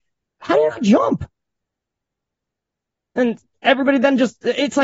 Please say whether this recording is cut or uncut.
uncut